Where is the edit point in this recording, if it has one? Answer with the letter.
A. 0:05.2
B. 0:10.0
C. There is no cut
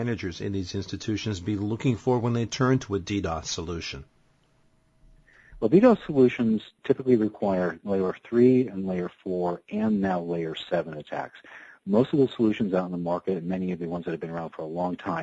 C